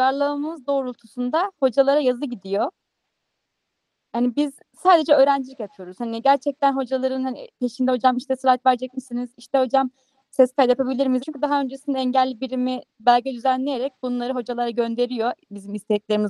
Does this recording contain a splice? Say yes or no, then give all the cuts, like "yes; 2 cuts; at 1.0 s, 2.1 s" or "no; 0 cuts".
yes; 2 cuts; at 11.2 s, 12.9 s